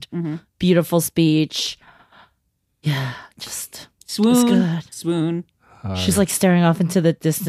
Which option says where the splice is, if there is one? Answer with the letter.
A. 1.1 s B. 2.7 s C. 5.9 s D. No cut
D